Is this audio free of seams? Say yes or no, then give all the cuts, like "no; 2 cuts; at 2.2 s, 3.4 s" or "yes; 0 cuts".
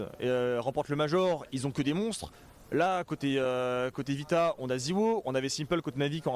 yes; 0 cuts